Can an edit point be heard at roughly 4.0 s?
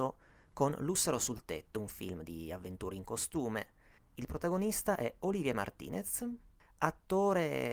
yes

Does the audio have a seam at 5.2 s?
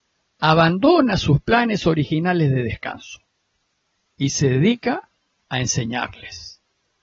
no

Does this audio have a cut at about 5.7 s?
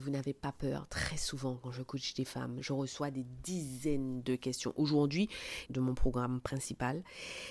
yes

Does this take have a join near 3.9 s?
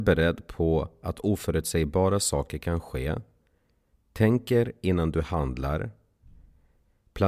yes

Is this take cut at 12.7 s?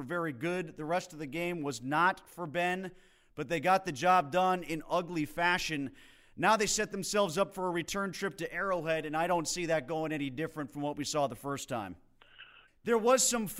yes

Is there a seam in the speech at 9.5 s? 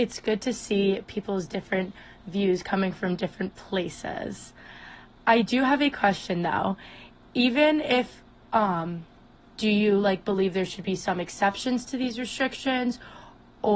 yes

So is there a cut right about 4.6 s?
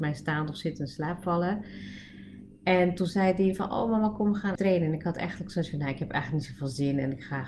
yes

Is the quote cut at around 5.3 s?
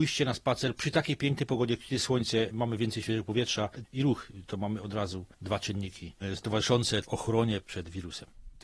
yes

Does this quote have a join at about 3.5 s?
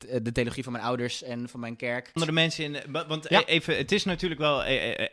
no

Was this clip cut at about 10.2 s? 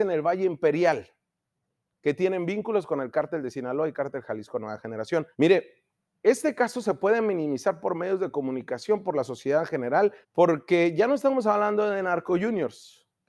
yes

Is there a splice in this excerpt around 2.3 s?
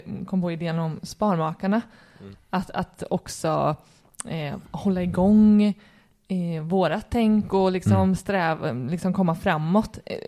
yes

